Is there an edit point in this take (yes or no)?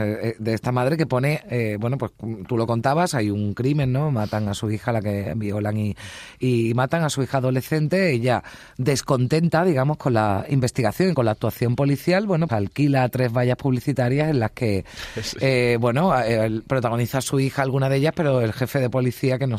yes